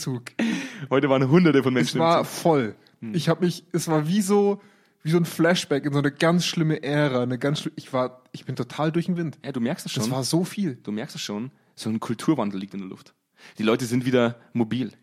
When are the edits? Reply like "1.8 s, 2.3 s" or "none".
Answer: none